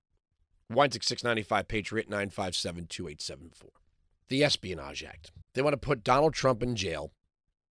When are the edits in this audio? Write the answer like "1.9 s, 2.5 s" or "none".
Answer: 4.2 s, 5.4 s